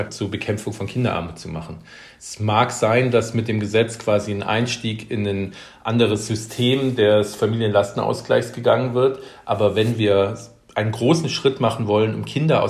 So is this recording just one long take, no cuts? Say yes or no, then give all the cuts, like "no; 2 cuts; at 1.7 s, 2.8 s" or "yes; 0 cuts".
yes; 0 cuts